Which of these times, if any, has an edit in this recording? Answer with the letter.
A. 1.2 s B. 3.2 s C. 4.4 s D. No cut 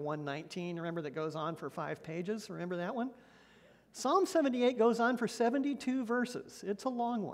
D